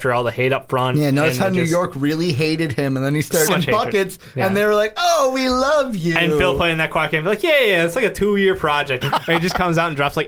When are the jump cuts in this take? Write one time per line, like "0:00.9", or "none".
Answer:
0:03.5
0:09.0